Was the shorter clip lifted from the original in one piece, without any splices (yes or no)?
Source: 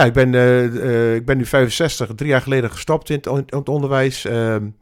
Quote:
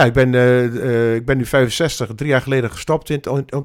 yes